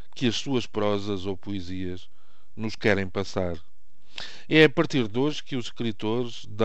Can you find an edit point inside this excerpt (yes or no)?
no